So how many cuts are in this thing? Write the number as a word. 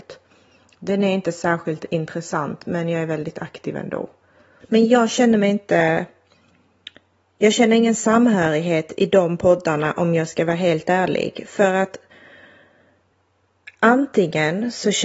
one